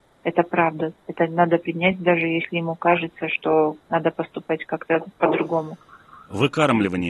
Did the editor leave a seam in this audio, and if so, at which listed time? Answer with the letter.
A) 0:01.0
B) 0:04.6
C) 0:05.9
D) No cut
D